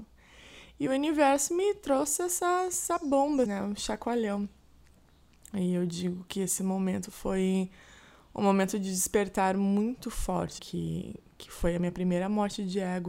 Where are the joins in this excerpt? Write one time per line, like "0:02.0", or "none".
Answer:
0:03.5
0:10.6